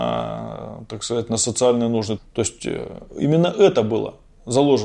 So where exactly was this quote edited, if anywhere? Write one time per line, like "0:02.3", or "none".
0:02.2